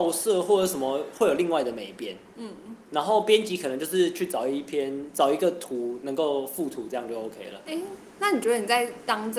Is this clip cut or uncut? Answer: uncut